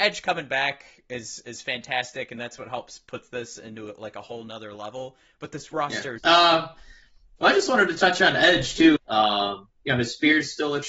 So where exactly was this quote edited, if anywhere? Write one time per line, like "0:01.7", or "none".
0:06.2
0:09.0